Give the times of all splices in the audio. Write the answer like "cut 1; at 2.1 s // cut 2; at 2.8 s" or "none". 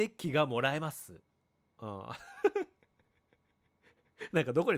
cut 1; at 1.7 s